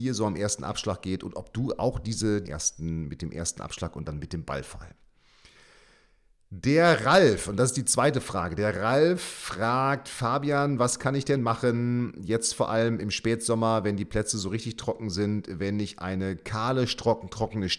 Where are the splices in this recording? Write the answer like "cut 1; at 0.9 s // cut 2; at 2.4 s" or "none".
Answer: cut 1; at 2.4 s